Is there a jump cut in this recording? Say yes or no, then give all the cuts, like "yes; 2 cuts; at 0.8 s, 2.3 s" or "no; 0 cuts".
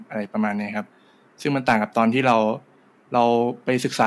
no; 0 cuts